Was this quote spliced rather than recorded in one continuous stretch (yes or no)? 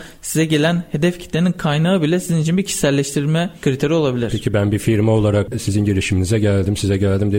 no